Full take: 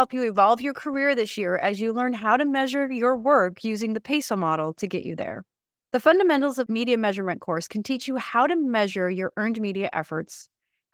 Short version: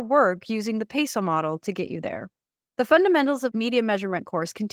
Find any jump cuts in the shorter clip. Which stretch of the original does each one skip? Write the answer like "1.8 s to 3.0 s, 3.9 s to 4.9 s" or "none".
none